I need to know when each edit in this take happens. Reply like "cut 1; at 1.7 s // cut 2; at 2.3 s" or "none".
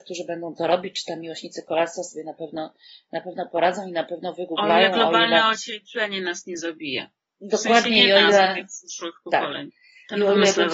none